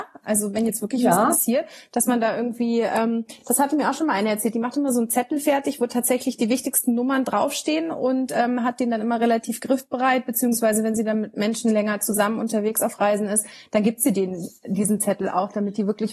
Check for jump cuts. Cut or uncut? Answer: uncut